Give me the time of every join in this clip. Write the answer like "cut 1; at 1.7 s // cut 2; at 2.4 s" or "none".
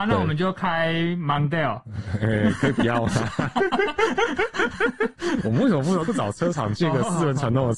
cut 1; at 6.1 s